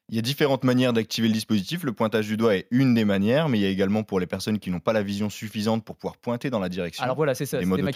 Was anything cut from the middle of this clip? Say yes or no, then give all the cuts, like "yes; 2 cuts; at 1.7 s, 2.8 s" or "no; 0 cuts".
no; 0 cuts